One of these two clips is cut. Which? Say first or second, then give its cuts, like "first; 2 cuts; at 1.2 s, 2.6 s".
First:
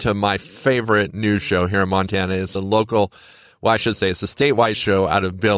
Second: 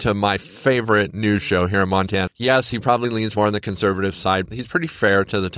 second; 2 cuts; at 2.3 s, 4.5 s